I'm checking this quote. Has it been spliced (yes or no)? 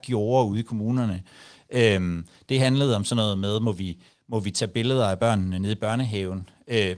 no